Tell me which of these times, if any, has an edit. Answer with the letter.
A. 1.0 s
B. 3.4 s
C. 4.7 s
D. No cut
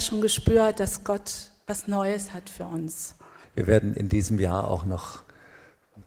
B